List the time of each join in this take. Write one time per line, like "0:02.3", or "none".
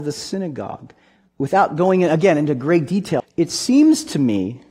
0:01.3
0:03.2